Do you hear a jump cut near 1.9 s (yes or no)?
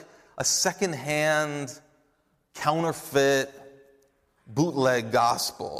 no